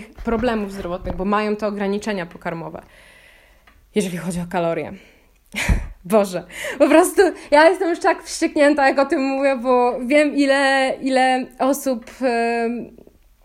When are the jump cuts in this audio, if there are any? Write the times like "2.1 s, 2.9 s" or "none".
none